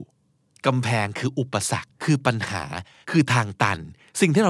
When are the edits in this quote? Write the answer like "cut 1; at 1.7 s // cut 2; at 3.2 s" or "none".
cut 1; at 1.9 s